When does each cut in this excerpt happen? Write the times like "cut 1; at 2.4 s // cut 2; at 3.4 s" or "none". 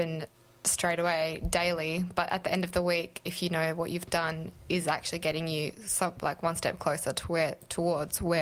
none